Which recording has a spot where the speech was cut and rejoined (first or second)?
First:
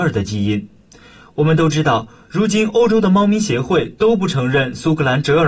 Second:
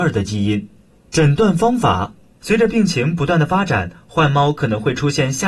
second